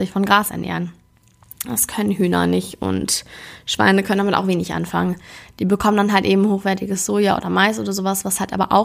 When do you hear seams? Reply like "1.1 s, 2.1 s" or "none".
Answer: none